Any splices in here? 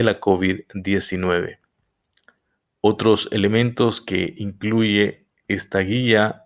no; 0 cuts

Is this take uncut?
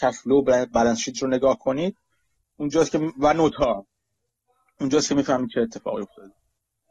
yes; 0 cuts

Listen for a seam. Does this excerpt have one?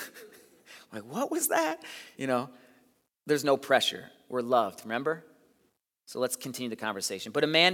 no; 0 cuts

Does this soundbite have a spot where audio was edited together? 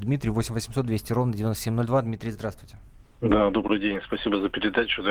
no; 0 cuts

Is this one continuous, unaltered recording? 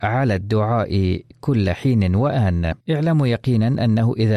no; 1 cut; at 2.8 s

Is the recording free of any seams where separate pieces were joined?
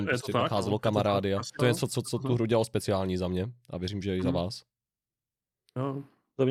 no; 1 cut; at 1.6 s

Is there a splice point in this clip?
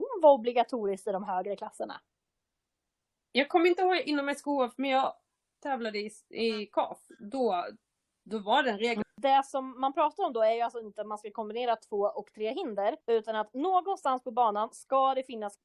yes; 2 cuts; at 9.0 s, 13.0 s

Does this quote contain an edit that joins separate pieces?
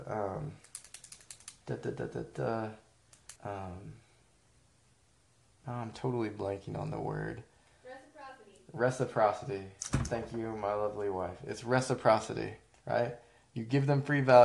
yes; 1 cut; at 3.4 s

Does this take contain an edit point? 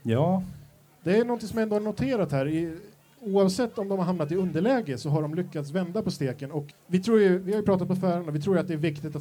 yes; 1 cut; at 6.7 s

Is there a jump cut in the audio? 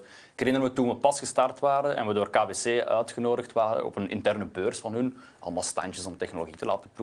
no; 0 cuts

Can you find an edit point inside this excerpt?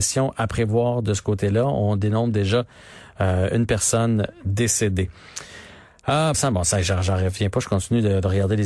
yes; 1 cut; at 6.3 s

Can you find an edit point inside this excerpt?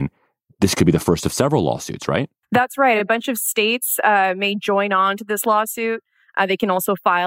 no; 0 cuts

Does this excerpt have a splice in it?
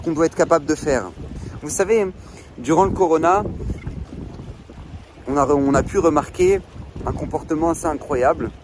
yes; 1 cut; at 1.6 s

